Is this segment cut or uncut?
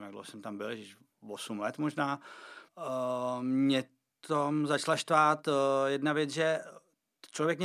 cut